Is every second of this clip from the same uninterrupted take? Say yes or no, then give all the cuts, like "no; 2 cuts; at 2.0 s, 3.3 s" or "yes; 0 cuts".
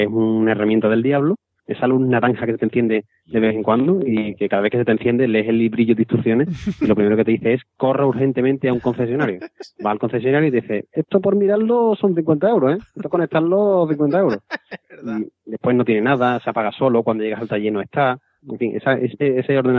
no; 1 cut; at 1.6 s